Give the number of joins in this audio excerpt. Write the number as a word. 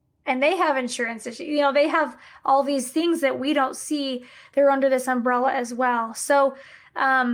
zero